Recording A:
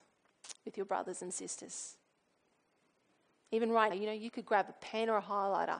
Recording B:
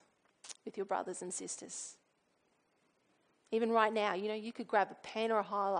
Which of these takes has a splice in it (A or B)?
A